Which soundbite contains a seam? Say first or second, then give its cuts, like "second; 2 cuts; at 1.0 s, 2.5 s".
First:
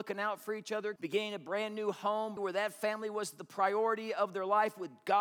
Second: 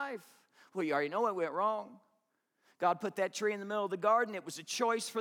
first; 2 cuts; at 1.0 s, 2.4 s